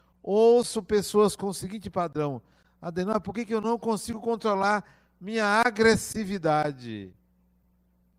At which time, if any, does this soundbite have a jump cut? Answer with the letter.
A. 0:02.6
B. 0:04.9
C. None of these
C